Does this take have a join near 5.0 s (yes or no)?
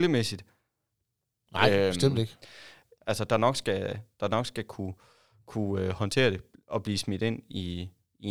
no